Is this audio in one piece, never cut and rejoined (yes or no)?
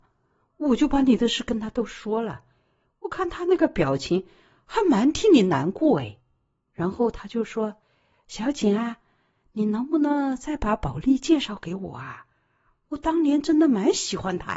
yes